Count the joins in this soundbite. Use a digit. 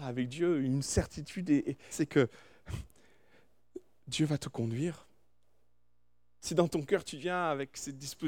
1